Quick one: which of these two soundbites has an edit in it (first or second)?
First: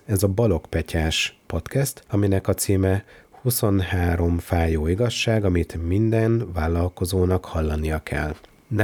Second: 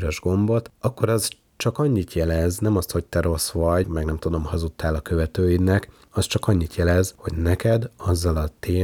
second